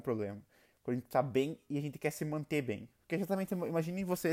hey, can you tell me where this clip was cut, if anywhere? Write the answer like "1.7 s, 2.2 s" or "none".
none